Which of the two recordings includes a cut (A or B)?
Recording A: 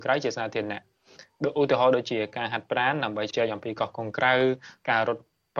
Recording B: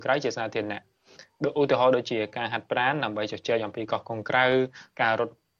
A